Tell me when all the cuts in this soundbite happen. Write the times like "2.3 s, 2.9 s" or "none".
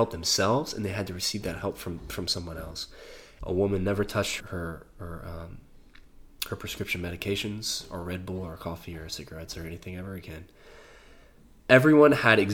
3.4 s, 4.4 s